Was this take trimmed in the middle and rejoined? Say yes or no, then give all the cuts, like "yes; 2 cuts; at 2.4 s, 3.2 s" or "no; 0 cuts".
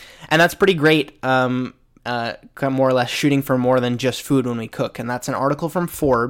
yes; 1 cut; at 2.0 s